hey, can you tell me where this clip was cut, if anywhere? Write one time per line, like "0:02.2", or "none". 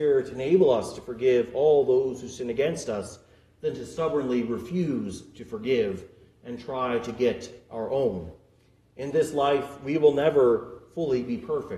none